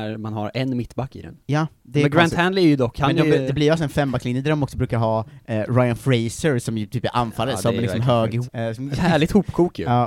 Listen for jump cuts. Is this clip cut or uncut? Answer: cut